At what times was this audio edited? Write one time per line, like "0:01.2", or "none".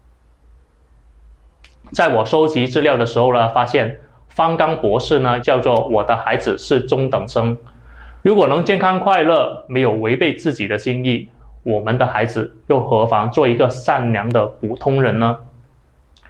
0:05.4
0:08.2